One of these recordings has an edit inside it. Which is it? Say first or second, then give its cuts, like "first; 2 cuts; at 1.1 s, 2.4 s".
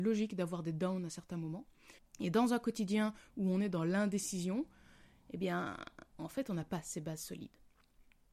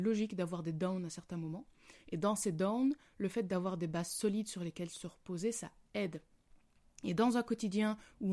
first; 1 cut; at 2.0 s